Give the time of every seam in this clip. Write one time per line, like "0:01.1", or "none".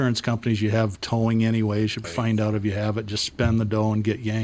0:02.0